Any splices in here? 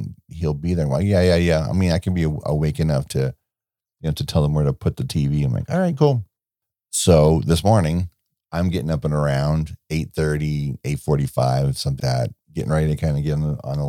yes; 1 cut; at 12.0 s

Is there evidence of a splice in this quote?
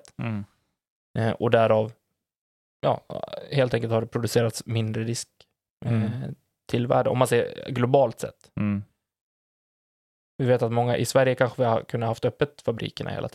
no; 0 cuts

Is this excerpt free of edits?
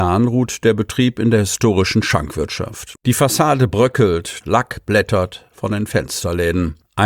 no; 2 cuts; at 3.0 s, 4.4 s

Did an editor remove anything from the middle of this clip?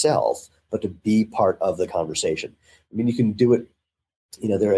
no; 0 cuts

